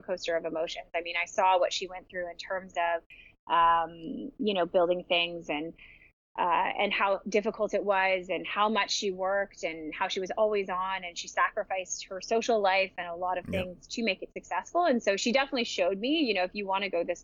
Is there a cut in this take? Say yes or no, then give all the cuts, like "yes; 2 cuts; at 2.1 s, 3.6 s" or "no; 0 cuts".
no; 0 cuts